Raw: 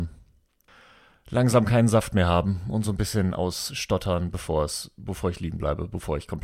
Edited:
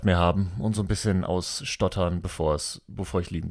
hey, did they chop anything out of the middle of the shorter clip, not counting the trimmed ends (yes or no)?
no